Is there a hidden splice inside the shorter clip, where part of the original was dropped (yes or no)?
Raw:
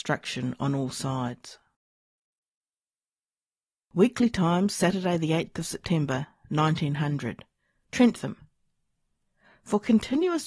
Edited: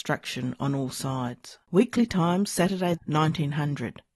yes